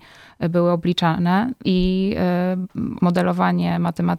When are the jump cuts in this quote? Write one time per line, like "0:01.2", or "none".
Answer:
0:01.6
0:03.0